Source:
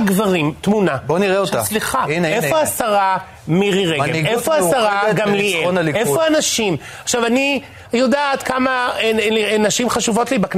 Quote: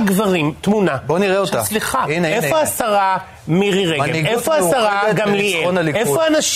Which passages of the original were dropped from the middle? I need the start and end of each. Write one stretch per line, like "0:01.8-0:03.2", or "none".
none